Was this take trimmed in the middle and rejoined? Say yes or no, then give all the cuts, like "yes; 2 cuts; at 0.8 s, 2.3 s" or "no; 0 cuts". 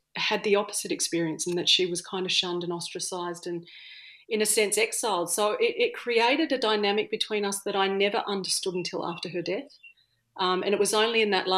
no; 0 cuts